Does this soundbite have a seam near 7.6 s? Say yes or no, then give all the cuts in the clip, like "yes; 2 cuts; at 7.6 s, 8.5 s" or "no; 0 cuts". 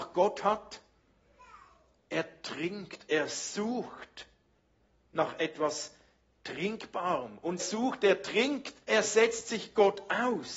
yes; 2 cuts; at 7.6 s, 8.8 s